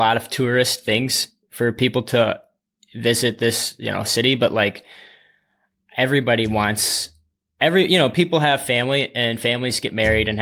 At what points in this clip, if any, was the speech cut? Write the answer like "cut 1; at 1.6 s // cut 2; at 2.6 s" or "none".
none